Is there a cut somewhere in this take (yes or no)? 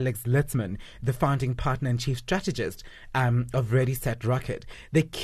no